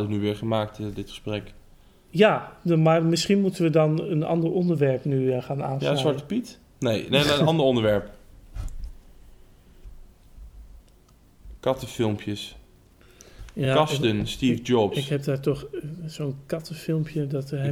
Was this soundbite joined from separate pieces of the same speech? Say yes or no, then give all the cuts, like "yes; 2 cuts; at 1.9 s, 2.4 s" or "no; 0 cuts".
no; 0 cuts